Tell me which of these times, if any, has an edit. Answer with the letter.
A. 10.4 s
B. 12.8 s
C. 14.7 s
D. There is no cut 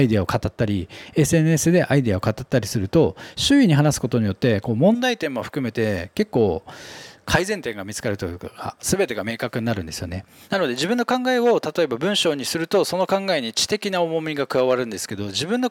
A